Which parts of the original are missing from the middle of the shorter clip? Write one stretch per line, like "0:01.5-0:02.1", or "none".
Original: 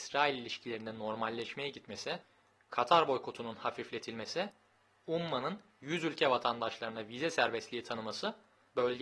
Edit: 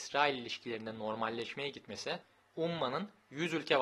0:02.4-0:04.9